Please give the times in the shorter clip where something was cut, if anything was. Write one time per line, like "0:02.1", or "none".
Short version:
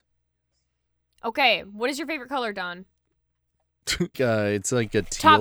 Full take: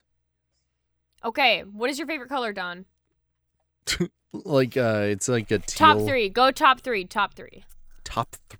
0:04.1